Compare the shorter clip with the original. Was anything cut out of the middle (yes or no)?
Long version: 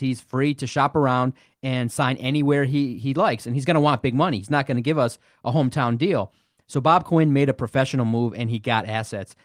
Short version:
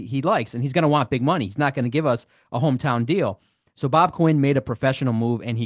no